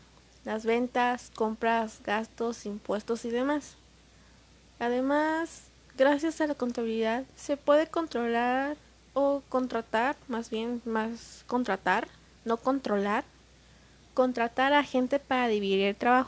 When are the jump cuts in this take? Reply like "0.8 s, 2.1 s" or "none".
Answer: none